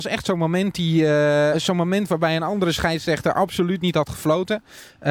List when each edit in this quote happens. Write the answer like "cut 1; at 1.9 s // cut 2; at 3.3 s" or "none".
cut 1; at 1.5 s